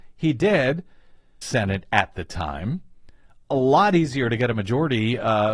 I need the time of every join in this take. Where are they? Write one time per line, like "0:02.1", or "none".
0:01.4